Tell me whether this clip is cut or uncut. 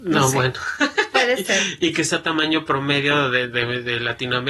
uncut